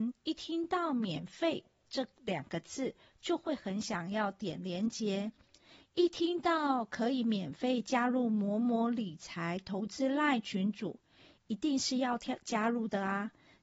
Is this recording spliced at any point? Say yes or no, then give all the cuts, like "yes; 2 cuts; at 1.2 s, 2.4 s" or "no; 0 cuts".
no; 0 cuts